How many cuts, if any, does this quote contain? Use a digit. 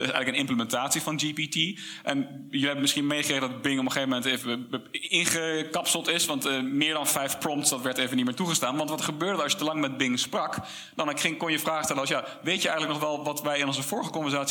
0